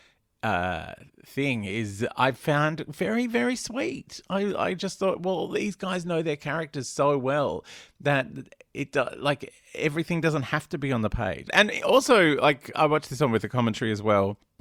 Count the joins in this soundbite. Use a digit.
2